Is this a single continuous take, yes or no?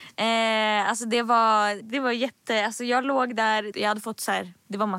no